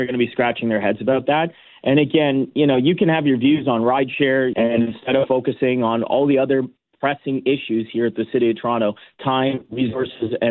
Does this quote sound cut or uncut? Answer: cut